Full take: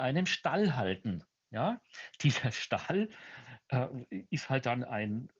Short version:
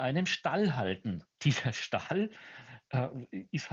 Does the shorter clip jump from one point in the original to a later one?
yes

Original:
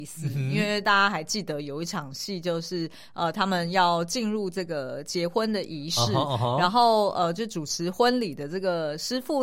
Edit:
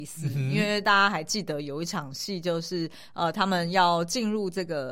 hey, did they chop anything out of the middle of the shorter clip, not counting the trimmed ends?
no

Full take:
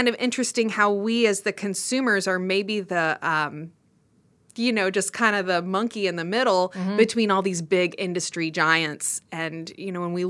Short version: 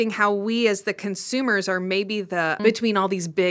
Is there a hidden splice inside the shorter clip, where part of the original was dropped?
yes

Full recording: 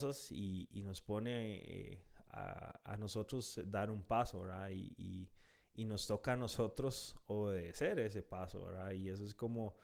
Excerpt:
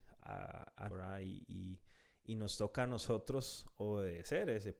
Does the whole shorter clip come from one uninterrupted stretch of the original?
no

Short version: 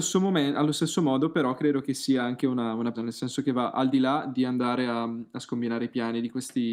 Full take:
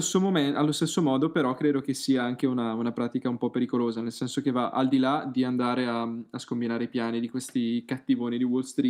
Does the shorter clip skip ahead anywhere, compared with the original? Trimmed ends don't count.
yes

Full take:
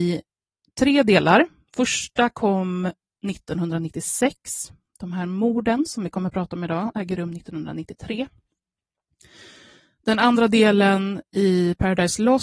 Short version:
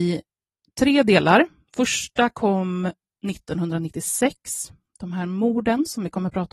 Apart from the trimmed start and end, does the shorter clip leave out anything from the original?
no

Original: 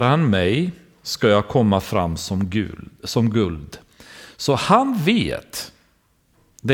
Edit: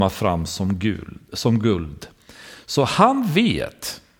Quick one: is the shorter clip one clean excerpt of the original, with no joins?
yes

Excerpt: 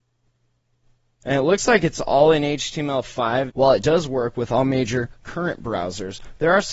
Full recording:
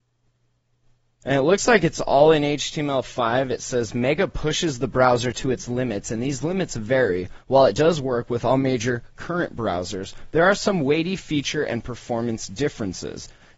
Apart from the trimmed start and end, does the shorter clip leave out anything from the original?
yes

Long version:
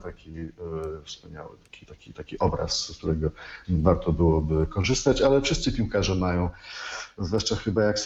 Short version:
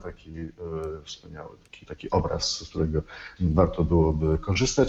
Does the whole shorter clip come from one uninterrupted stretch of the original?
no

